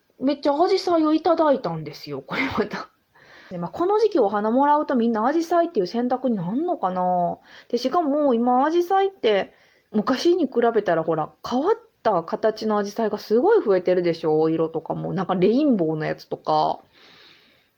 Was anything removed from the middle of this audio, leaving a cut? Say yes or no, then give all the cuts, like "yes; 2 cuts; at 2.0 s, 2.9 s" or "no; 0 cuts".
yes; 2 cuts; at 3.5 s, 9.9 s